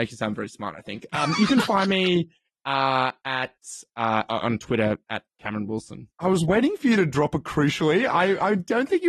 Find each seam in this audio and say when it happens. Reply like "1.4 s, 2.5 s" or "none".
6.1 s